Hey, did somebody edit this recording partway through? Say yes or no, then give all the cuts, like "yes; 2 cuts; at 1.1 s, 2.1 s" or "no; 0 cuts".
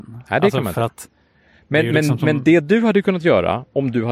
no; 0 cuts